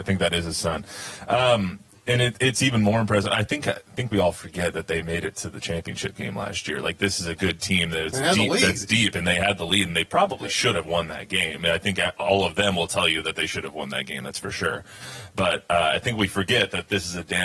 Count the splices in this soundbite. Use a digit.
0